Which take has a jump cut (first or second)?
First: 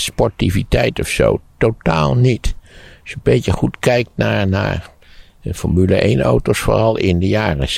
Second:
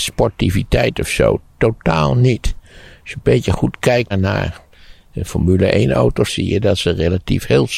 second